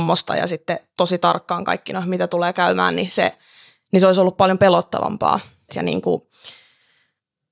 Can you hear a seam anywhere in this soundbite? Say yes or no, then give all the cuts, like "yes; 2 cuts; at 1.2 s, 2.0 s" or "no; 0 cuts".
yes; 1 cut; at 5.7 s